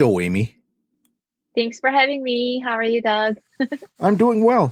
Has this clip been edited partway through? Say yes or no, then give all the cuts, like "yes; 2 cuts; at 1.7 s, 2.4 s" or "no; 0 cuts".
yes; 1 cut; at 3.5 s